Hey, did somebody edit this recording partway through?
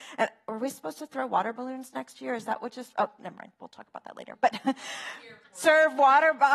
no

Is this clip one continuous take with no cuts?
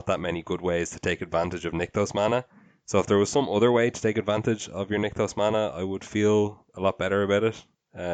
yes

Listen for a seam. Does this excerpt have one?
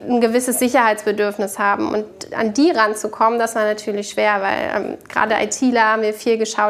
no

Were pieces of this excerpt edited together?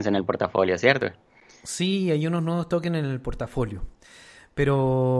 no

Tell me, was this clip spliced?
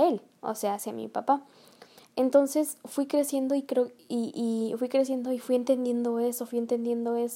no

